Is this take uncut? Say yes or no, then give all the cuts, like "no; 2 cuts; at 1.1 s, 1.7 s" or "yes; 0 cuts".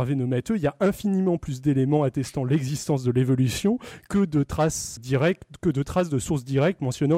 no; 1 cut; at 5.0 s